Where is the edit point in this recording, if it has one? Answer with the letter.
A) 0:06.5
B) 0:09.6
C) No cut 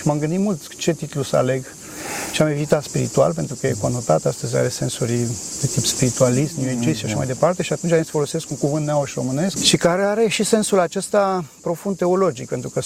B